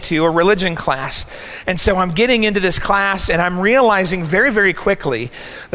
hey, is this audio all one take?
yes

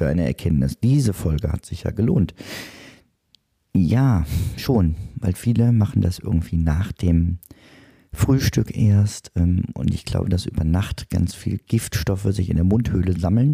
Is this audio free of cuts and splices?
yes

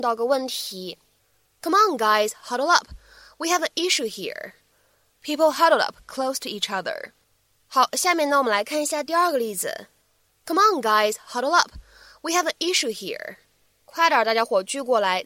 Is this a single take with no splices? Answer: no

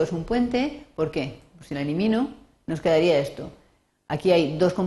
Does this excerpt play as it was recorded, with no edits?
yes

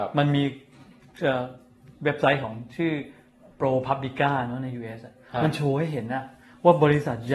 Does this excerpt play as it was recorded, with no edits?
yes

